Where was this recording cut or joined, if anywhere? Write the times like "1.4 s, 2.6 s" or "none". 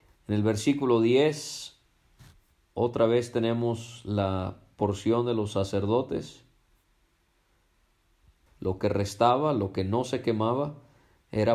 8.5 s

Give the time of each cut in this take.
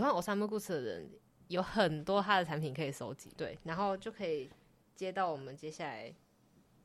3.3 s

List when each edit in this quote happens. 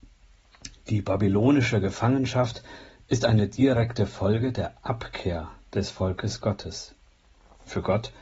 none

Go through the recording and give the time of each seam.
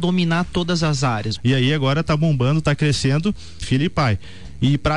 1.4 s, 3.6 s

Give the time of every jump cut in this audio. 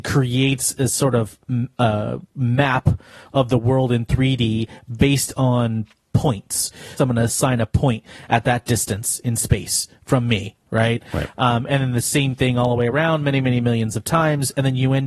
7.0 s

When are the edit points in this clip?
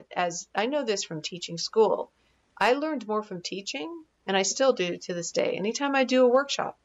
none

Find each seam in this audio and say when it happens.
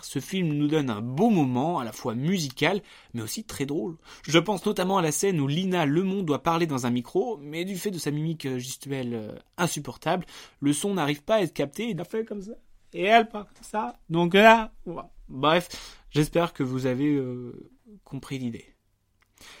12.0 s

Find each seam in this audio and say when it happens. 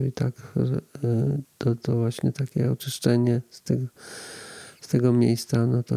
1.4 s

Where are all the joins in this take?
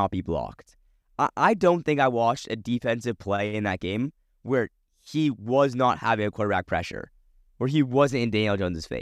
none

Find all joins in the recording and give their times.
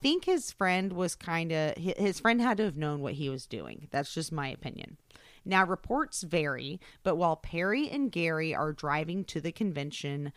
none

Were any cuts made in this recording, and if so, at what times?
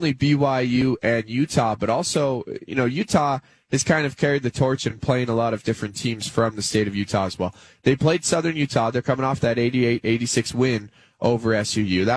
none

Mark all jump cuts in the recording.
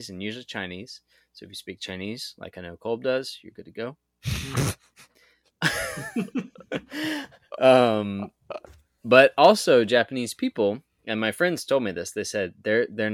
none

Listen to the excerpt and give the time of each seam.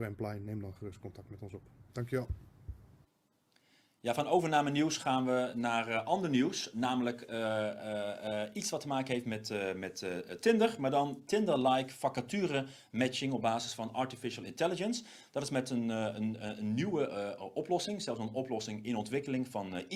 1.9 s

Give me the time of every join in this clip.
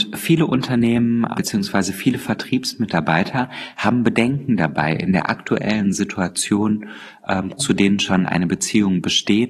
1.3 s, 7.6 s

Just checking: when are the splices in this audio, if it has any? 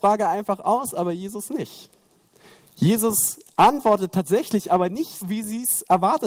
5.2 s

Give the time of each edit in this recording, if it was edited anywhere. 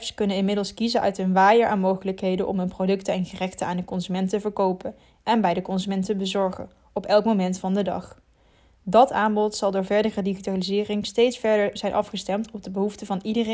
none

